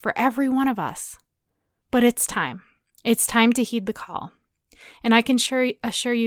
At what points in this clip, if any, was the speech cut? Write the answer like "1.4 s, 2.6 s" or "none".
none